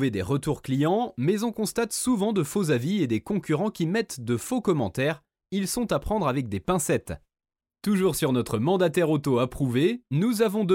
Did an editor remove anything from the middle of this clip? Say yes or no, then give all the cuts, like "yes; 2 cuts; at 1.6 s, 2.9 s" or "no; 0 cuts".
yes; 1 cut; at 7.6 s